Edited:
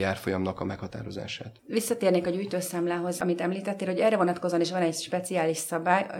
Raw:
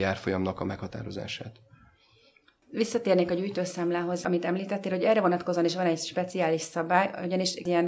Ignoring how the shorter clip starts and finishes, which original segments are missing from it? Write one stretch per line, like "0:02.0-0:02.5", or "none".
0:01.6-0:02.6